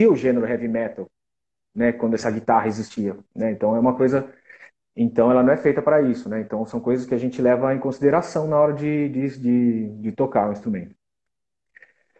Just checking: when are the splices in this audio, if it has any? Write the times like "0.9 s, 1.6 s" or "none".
none

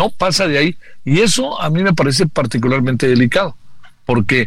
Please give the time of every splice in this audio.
none

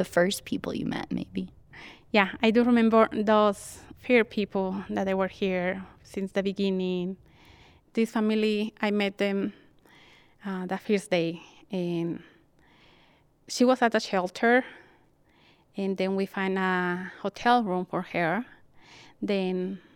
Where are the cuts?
none

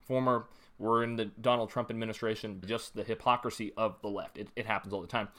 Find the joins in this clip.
2.6 s

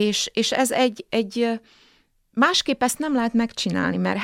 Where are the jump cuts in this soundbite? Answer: none

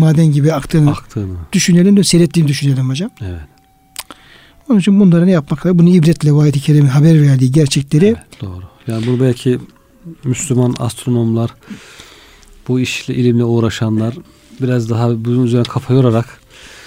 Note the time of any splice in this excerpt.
8.4 s

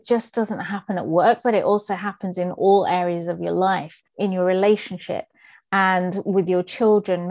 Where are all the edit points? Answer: 4.1 s

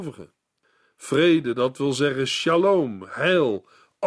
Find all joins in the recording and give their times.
none

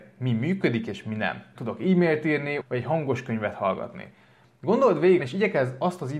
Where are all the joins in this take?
1.5 s, 2.6 s, 5.2 s

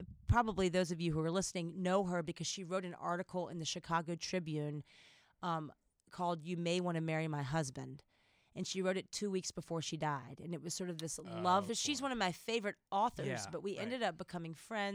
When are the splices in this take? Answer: 11.7 s

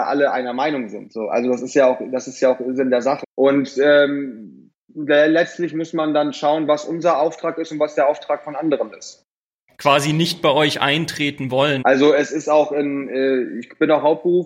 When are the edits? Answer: 3.2 s, 9.7 s, 11.8 s

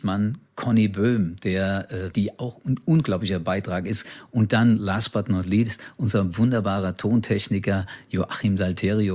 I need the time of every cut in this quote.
2.1 s

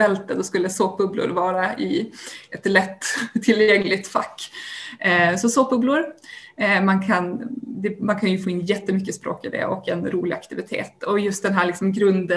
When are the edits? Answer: none

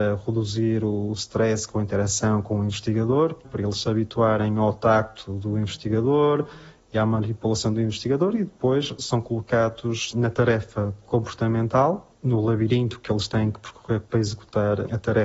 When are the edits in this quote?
3.4 s

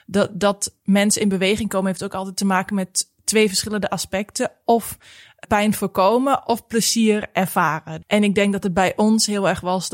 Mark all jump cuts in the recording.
5.4 s, 8.0 s

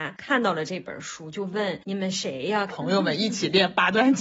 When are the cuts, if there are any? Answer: 2.7 s

